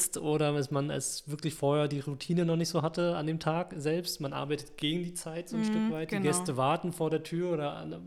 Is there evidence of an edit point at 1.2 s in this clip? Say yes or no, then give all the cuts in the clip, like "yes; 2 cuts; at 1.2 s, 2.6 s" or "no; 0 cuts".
no; 0 cuts